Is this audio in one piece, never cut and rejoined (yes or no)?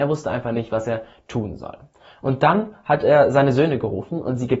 yes